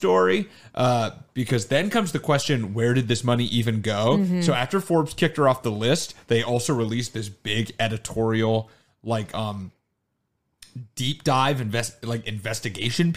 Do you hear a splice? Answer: no; 0 cuts

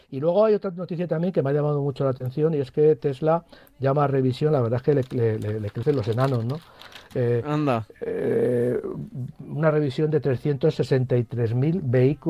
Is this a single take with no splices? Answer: yes; 0 cuts

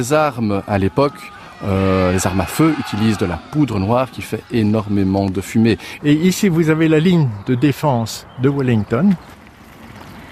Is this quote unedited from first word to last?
no; 1 cut; at 6.0 s

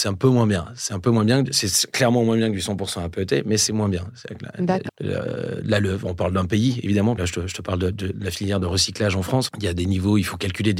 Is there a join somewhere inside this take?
yes; 2 cuts; at 4.9 s, 7.2 s

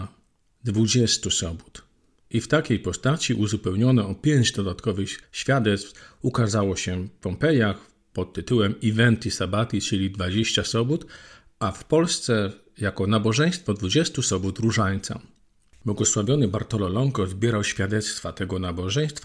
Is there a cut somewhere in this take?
no; 0 cuts

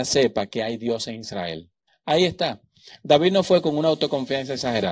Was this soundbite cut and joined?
yes; 1 cut; at 1.9 s

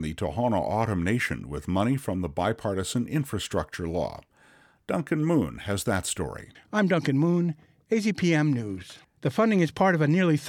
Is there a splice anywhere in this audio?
yes; 2 cuts; at 6.5 s, 9.2 s

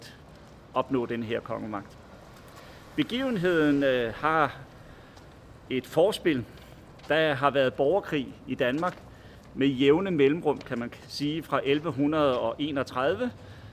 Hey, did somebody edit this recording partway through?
no; 0 cuts

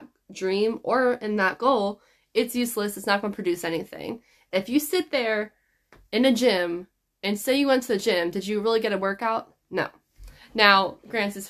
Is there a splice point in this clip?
no; 0 cuts

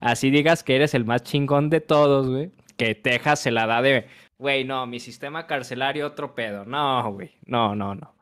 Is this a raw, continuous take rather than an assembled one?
yes; 0 cuts

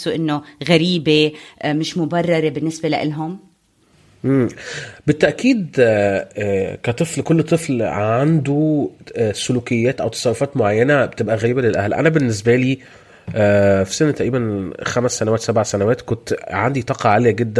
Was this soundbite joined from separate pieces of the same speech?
yes; 1 cut; at 7.2 s

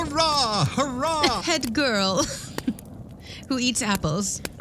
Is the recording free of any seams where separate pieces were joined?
no; 1 cut; at 1.4 s

